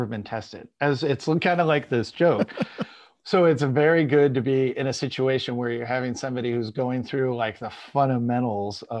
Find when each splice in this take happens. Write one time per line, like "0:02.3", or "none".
none